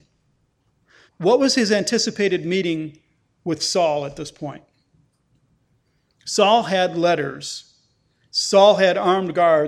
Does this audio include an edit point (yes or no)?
yes